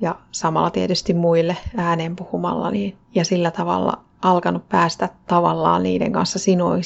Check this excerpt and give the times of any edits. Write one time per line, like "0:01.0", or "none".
0:03.0
0:04.1